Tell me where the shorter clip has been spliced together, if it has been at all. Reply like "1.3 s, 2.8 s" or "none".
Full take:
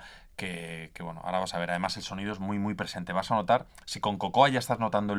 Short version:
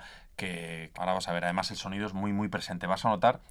0.9 s